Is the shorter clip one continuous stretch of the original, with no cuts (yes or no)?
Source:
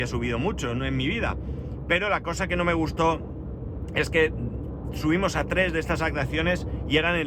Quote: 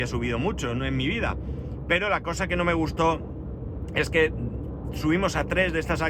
yes